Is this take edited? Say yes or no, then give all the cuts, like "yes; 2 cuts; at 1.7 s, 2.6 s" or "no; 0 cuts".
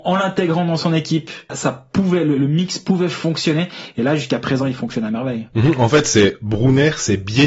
yes; 1 cut; at 1.5 s